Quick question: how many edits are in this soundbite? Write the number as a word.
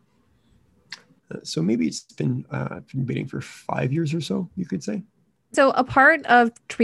one